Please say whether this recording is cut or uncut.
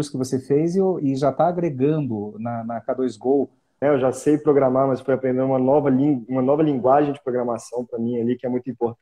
cut